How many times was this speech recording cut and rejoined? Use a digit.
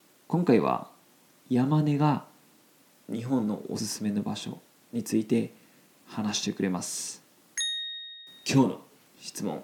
1